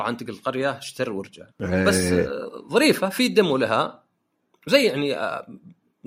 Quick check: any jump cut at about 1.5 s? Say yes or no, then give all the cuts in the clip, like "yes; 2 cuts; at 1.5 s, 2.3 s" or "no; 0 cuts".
yes; 1 cut; at 1.5 s